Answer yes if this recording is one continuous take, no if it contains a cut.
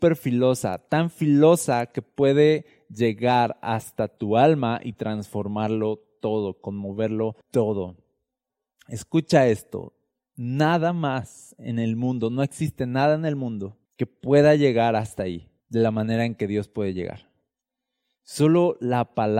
no